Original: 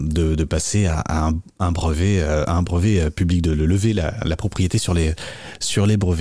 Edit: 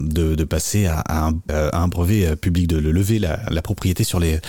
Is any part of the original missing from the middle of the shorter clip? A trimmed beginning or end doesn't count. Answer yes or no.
yes